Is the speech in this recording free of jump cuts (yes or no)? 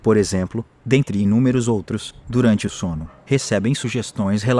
no